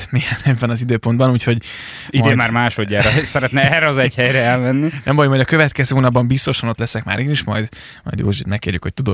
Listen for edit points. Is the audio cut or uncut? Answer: uncut